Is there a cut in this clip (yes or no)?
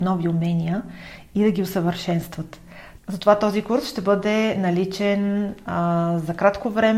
yes